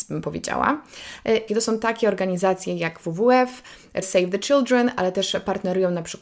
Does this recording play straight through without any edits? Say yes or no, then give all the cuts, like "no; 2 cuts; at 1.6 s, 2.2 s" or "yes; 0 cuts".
no; 2 cuts; at 1.5 s, 4.0 s